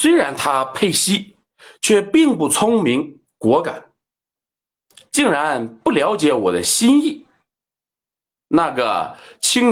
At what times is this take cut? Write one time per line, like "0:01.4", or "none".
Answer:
0:08.4